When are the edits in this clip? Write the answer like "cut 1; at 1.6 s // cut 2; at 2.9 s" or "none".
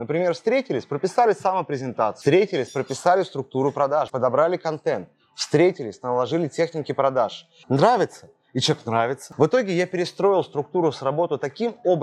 cut 1; at 4.1 s // cut 2; at 7.6 s